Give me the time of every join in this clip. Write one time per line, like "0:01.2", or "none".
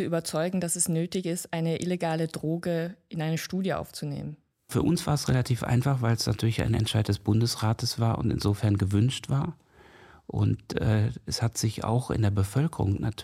none